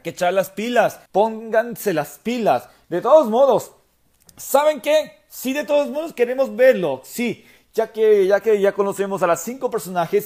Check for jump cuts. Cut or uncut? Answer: cut